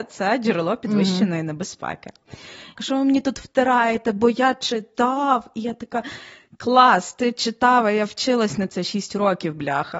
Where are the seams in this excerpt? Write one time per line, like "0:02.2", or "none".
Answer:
0:02.8